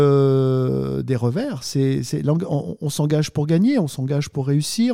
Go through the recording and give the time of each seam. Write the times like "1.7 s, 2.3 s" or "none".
none